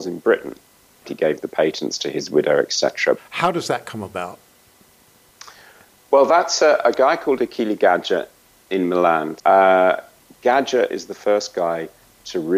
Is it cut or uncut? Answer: cut